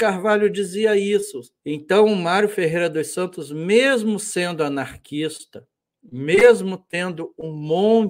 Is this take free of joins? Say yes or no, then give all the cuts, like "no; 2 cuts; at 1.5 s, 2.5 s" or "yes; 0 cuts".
no; 1 cut; at 1.6 s